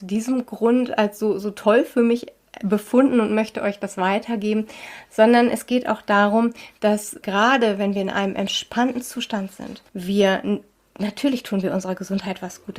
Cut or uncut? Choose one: cut